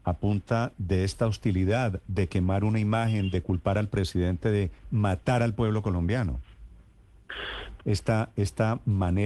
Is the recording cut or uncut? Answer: cut